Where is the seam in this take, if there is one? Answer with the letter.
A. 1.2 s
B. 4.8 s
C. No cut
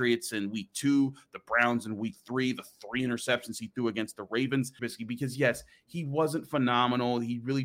B